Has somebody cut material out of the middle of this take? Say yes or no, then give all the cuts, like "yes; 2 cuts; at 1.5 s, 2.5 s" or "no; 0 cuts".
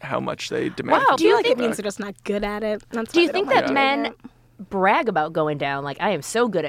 yes; 1 cut; at 1.2 s